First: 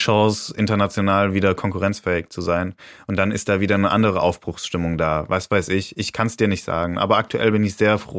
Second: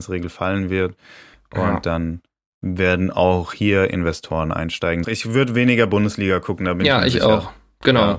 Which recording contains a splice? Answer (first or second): second